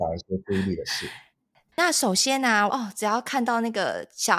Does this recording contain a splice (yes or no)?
yes